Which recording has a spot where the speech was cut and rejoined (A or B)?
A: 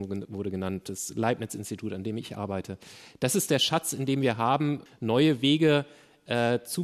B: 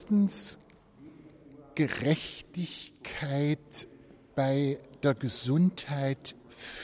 A